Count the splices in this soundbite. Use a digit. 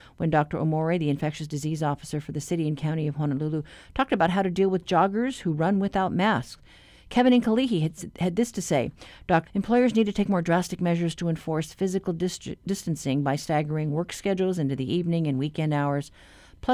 1